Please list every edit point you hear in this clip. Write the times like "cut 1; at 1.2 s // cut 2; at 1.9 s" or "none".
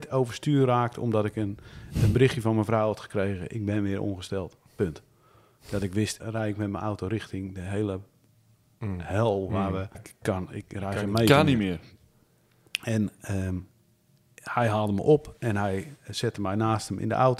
cut 1; at 6.2 s // cut 2; at 9.9 s